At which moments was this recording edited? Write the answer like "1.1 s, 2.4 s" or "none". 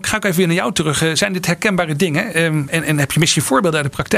none